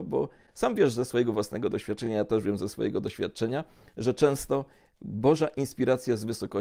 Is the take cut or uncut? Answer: uncut